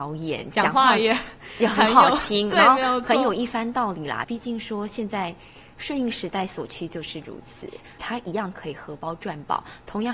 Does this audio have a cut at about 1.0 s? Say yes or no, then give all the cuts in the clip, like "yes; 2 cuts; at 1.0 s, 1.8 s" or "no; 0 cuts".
no; 2 cuts; at 4.2 s, 8.0 s